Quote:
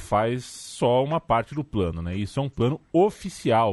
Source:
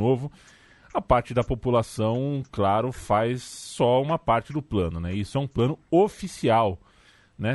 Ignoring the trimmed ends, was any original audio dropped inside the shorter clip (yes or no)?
no